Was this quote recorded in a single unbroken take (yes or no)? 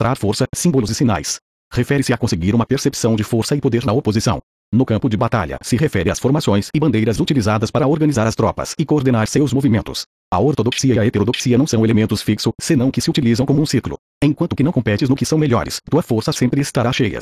no